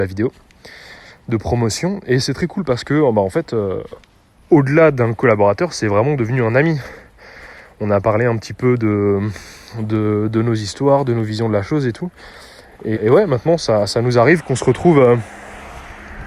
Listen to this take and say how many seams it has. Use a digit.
1